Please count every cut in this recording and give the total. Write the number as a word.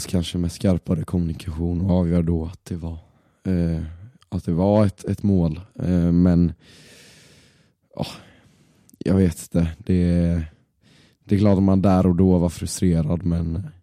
zero